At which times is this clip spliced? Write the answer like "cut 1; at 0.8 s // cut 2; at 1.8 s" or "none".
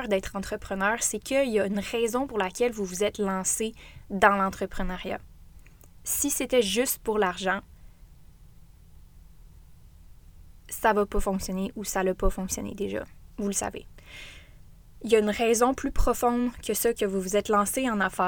none